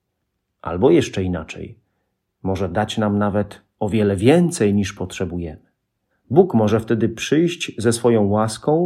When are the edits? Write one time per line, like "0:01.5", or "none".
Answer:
0:06.1